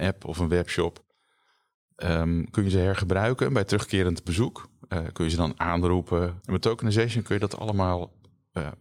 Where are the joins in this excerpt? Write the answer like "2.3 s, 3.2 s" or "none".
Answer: 6.4 s